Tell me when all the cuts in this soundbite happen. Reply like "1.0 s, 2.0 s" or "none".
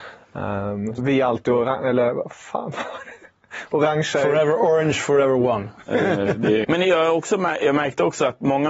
1.0 s, 6.6 s